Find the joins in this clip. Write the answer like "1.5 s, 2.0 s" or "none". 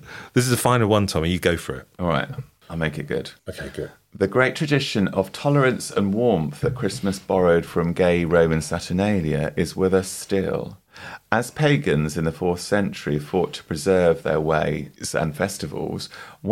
3.4 s